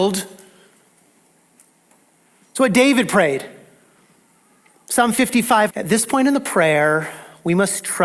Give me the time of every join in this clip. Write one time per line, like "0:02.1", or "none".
0:05.7